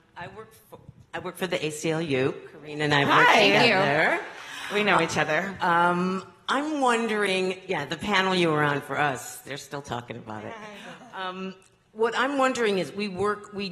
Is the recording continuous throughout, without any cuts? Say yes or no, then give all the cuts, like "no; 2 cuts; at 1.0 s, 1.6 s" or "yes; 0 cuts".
yes; 0 cuts